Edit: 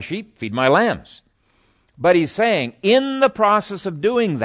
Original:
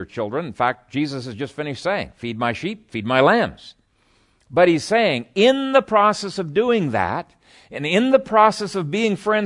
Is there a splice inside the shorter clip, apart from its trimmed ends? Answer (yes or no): no